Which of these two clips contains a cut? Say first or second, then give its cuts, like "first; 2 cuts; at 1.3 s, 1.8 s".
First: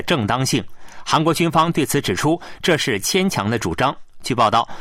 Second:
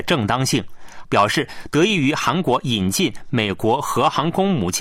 second; 1 cut; at 1.0 s